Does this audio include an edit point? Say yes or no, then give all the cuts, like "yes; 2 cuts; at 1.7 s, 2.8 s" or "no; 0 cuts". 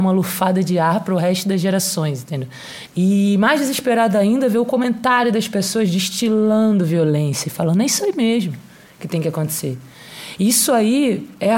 yes; 1 cut; at 2.9 s